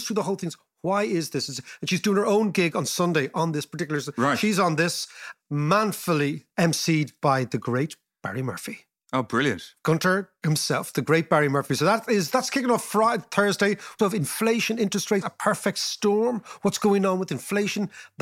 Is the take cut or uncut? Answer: cut